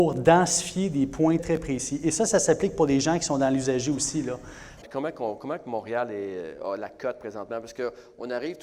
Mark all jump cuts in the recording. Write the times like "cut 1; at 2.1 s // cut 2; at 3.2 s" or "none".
cut 1; at 1.4 s // cut 2; at 4.8 s